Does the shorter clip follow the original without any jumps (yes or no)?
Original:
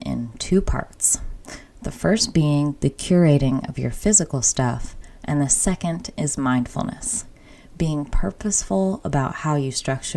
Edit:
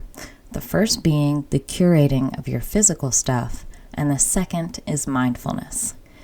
yes